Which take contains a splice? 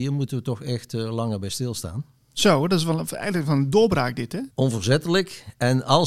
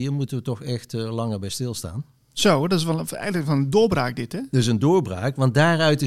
first; 1 cut; at 4.5 s

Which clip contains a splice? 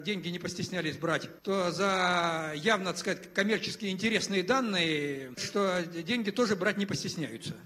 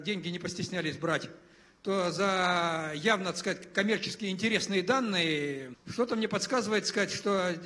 first; 2 cuts; at 1.4 s, 5.4 s

